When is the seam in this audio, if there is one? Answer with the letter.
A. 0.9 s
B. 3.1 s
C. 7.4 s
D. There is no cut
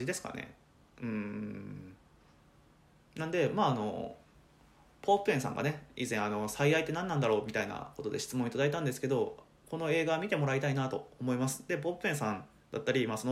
D